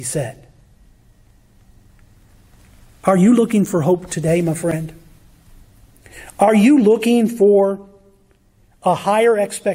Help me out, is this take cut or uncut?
uncut